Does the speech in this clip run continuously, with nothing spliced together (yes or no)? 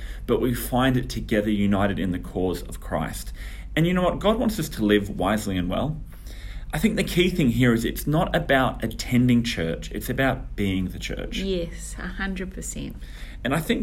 yes